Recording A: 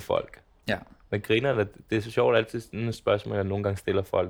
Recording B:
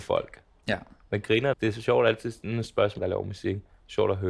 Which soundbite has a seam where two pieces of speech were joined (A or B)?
B